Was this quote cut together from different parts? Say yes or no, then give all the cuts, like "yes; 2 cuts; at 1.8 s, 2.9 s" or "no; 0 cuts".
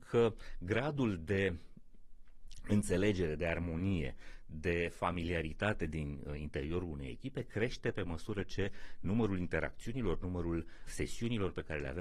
yes; 1 cut; at 10.9 s